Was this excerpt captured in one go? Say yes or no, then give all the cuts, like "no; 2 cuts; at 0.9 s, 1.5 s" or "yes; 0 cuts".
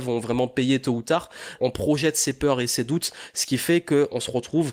no; 1 cut; at 1.6 s